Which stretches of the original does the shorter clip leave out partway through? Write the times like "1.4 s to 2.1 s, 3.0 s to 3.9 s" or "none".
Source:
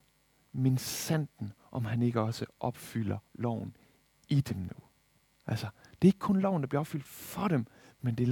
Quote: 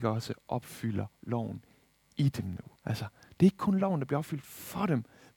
4.9 s to 5.4 s